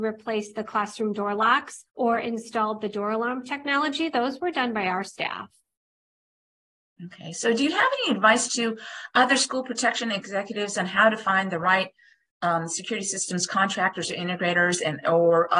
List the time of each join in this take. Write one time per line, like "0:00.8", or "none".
0:01.9